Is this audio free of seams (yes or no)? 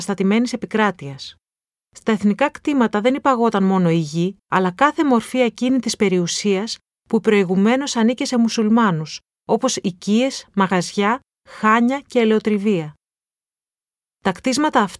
no